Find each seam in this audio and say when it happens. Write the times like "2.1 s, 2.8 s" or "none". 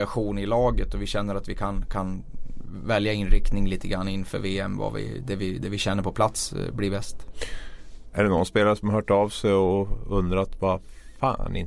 none